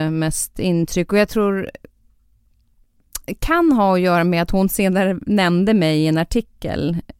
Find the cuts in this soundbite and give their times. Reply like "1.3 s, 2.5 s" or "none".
none